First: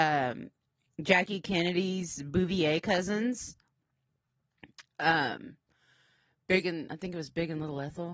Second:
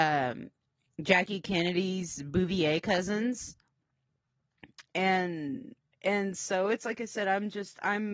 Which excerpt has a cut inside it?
second; 1 cut; at 4.9 s

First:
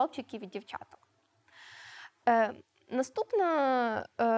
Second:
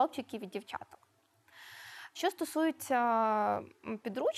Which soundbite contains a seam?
second; 1 cut; at 2.1 s

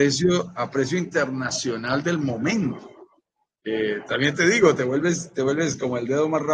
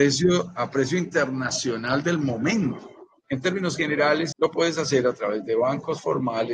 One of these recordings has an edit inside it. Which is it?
second; 2 cuts; at 3.2 s, 4.3 s

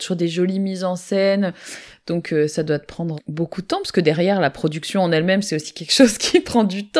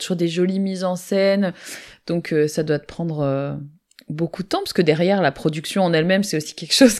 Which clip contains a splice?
first; 1 cut; at 3.2 s

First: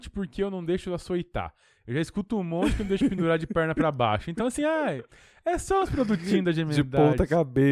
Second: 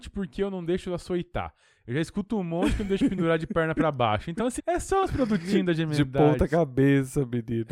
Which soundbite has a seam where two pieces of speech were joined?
second; 1 cut; at 4.6 s

